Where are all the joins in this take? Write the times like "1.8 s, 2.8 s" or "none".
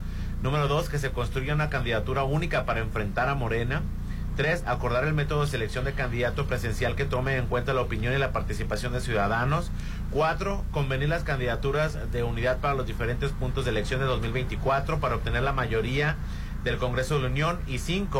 none